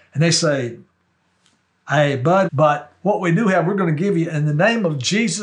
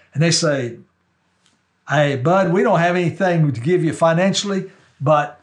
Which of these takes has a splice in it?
first; 1 cut; at 2.5 s

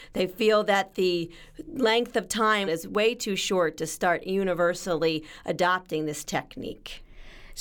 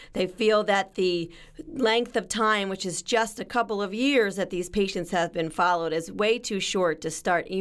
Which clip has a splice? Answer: first; 1 cut; at 2.7 s

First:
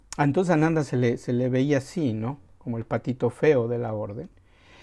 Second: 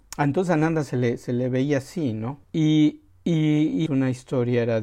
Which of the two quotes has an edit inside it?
second; 2 cuts; at 2.4 s, 3.9 s

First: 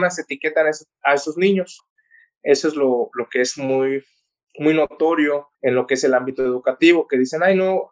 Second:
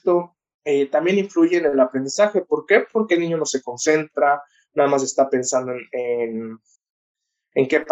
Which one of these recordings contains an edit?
first; 2 cuts; at 3.1 s, 5.5 s

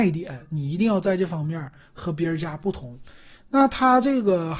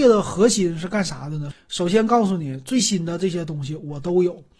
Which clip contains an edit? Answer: second; 1 cut; at 1.5 s

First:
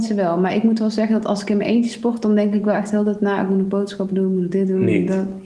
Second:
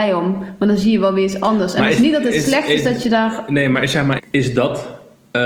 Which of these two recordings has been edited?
second; 1 cut; at 4.2 s

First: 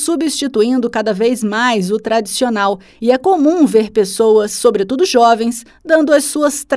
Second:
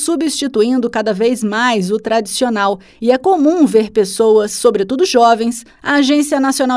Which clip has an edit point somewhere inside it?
second; 1 cut; at 5.7 s

